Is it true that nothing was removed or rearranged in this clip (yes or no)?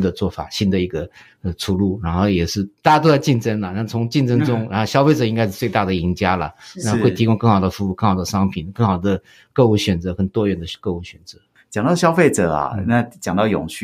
yes